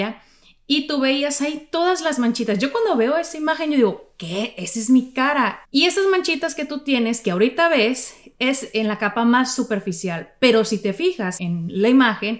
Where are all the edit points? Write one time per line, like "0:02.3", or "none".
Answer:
0:05.6
0:11.4